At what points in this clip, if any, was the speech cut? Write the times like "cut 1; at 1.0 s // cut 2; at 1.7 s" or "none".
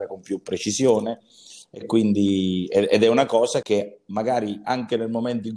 cut 1; at 3.6 s